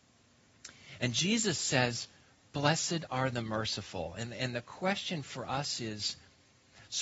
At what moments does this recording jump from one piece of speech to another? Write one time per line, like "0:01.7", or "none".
none

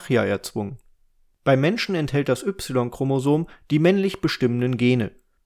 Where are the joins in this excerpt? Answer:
none

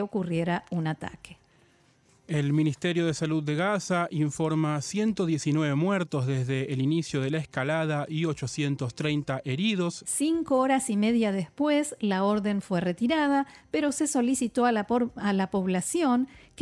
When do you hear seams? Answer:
0:10.0

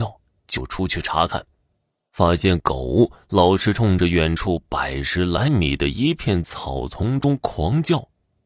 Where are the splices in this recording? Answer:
none

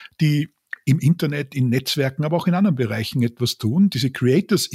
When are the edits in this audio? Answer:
none

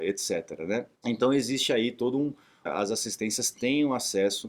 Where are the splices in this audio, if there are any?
0:01.0
0:02.7

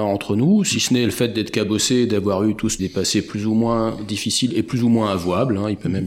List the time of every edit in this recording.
0:02.8

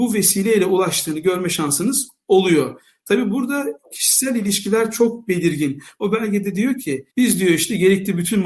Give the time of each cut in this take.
0:06.0
0:07.1

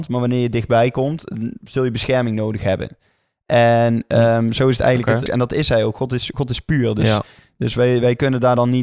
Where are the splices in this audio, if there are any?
0:05.3

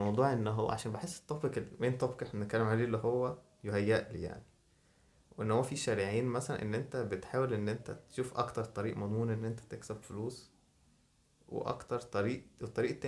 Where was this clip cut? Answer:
none

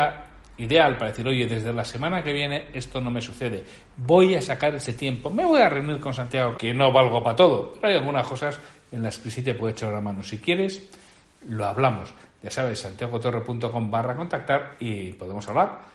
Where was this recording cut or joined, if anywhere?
0:06.5

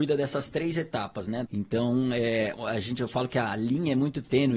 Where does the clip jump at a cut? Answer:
0:01.5

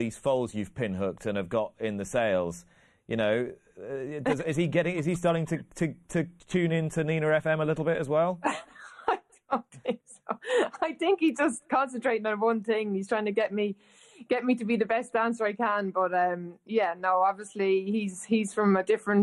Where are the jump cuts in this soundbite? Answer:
0:06.4

